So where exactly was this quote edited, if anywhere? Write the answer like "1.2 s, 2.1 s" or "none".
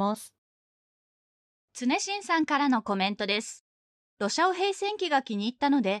none